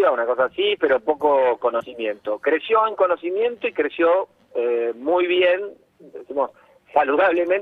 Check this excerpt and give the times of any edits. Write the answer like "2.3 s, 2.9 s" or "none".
none

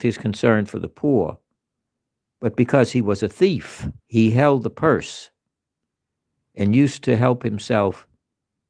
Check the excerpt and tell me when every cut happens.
4.0 s

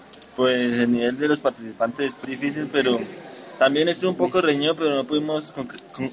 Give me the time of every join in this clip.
2.2 s

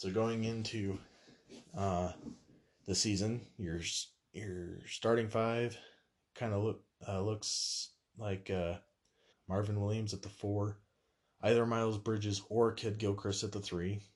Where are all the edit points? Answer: 9.3 s

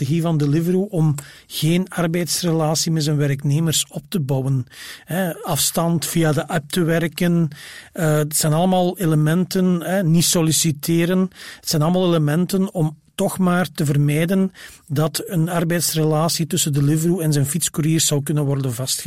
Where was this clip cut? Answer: 15.3 s

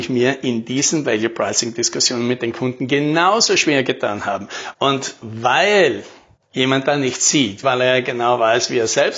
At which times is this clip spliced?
4.7 s, 7.6 s

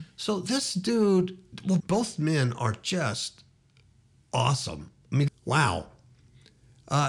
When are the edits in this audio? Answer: 1.8 s, 5.3 s

